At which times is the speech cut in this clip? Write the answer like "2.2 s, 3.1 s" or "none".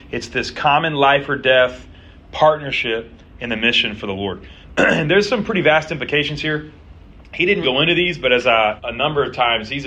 7.6 s, 8.8 s